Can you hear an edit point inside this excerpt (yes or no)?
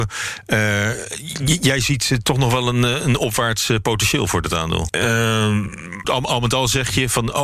yes